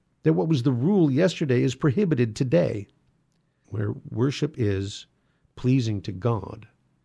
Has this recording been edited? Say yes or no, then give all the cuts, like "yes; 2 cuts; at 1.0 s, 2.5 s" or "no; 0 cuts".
yes; 1 cut; at 3.6 s